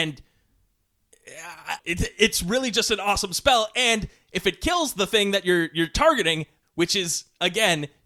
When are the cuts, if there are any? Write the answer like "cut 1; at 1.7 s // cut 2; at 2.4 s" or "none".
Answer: cut 1; at 1.8 s // cut 2; at 6.6 s